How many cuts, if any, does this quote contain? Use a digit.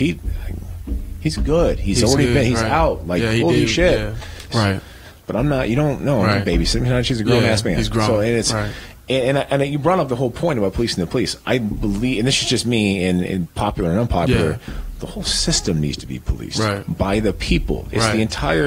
1